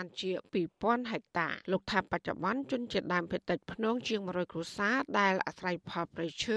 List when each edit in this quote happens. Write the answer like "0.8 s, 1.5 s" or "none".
1.6 s